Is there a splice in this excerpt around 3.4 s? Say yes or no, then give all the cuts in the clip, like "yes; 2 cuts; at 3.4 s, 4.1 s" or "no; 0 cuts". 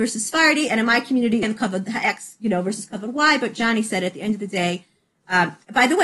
no; 1 cut; at 1.4 s